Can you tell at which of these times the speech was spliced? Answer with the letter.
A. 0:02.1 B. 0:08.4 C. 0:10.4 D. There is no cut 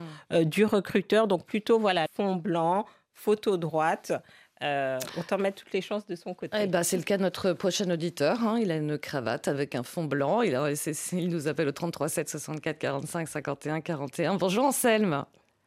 A